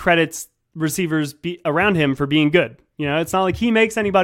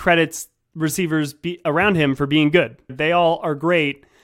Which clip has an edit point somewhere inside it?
second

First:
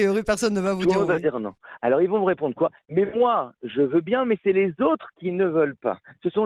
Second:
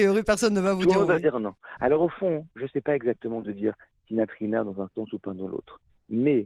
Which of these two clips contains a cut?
second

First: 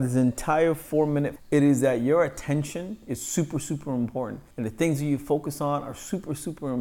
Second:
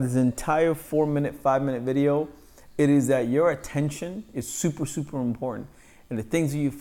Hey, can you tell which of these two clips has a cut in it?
first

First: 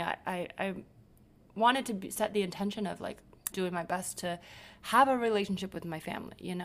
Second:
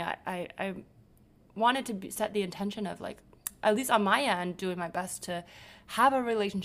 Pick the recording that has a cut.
first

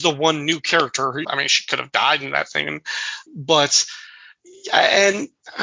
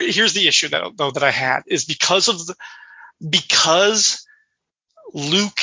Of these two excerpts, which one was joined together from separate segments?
first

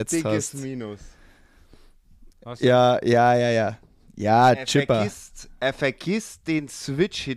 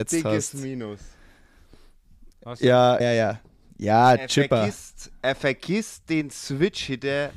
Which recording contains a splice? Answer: second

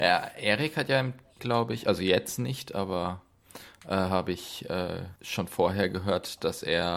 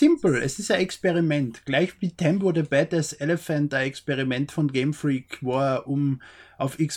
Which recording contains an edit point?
first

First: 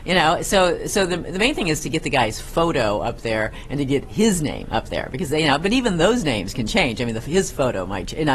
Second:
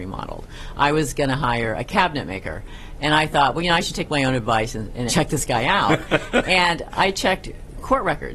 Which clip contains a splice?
second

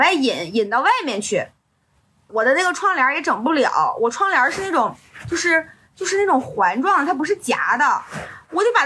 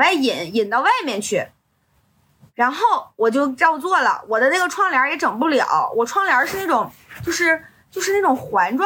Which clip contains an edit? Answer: first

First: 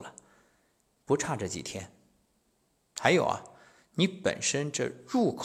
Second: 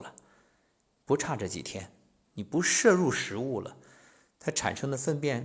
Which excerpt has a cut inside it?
second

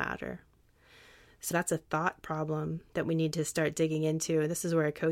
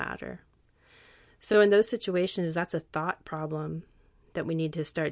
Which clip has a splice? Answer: first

